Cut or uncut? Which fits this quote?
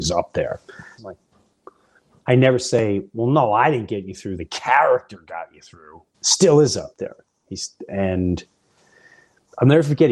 cut